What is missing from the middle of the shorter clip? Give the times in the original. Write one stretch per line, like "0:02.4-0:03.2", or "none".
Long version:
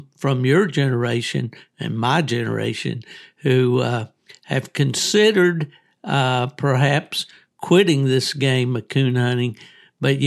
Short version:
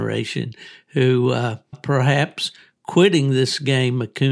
0:04.2-0:06.5